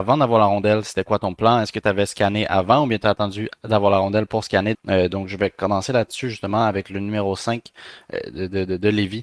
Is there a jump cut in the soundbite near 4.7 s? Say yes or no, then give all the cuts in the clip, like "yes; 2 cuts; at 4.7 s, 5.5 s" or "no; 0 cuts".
yes; 1 cut; at 4.7 s